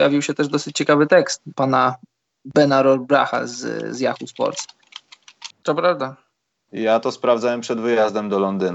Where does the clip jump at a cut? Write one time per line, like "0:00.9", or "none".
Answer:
0:01.5
0:05.5